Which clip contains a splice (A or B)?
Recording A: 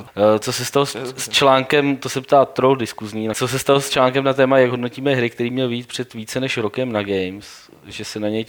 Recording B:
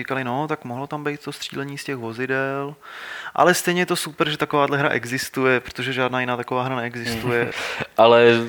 B